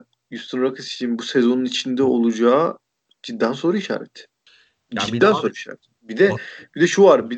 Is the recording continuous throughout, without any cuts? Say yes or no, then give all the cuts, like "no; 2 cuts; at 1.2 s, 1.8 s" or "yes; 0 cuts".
yes; 0 cuts